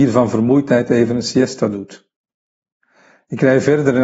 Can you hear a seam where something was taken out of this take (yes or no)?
no